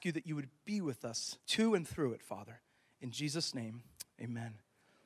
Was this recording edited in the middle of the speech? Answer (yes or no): yes